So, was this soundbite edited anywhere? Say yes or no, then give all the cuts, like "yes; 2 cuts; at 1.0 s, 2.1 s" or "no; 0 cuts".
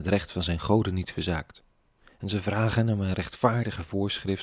no; 0 cuts